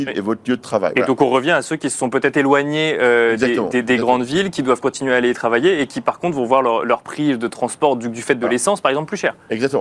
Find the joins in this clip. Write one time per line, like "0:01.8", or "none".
none

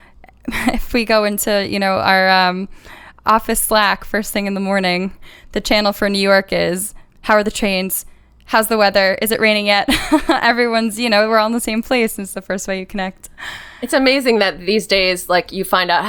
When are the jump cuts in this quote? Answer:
none

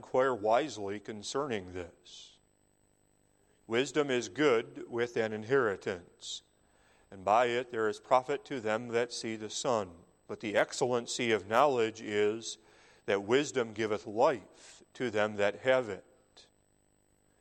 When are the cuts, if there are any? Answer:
0:10.2

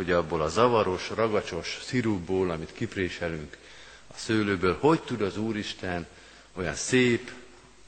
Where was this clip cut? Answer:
none

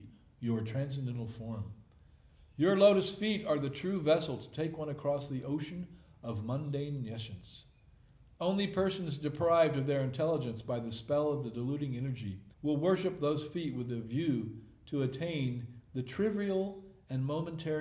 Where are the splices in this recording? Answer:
0:12.5

